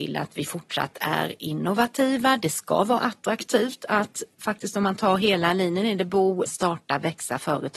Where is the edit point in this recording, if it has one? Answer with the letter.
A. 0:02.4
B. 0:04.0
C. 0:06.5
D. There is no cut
C